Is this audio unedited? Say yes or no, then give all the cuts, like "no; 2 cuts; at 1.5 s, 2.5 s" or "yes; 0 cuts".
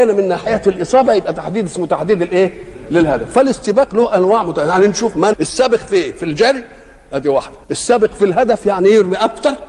no; 2 cuts; at 5.3 s, 7.6 s